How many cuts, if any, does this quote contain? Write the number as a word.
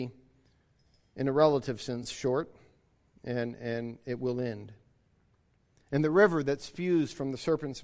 zero